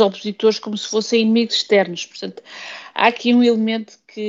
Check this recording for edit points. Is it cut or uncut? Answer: uncut